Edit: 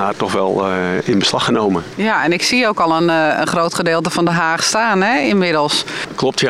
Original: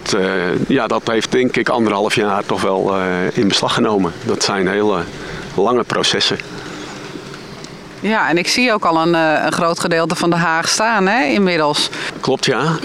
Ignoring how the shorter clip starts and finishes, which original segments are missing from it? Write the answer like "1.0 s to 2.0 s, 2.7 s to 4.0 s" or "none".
4.2 s to 7.9 s

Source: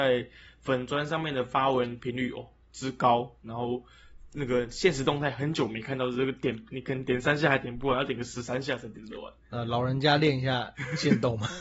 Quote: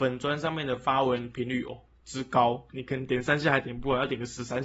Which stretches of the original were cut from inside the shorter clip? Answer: 3.4 s to 6.7 s

